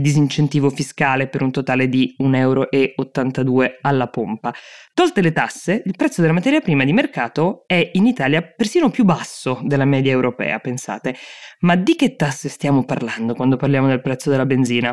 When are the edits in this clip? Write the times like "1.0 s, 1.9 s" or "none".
none